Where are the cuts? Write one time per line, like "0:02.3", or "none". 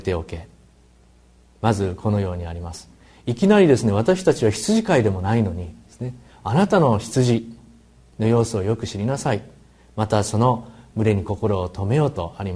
none